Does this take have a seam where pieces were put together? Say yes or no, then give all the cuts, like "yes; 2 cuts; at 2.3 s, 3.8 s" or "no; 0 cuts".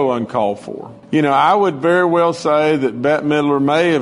yes; 1 cut; at 1.0 s